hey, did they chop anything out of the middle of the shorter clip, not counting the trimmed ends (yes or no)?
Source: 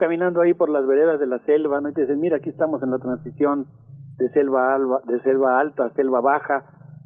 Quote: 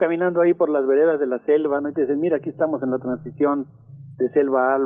no